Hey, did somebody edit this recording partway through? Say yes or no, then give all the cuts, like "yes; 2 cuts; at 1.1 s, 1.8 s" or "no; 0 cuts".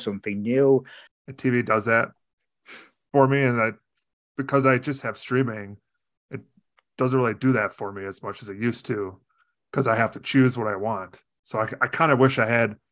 yes; 1 cut; at 1.1 s